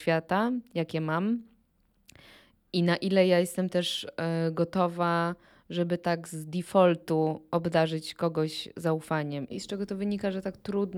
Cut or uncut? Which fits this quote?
cut